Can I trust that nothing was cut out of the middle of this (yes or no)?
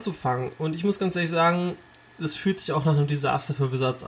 yes